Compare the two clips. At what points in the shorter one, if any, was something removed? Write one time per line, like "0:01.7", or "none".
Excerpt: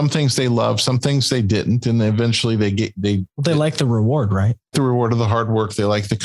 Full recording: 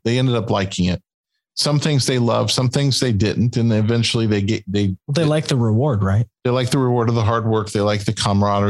0:04.7